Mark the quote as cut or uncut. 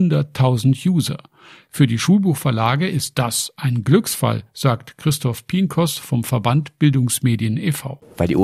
uncut